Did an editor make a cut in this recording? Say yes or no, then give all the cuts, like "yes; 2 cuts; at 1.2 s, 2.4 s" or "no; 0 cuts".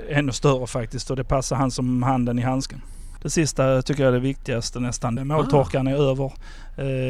yes; 2 cuts; at 3.2 s, 5.2 s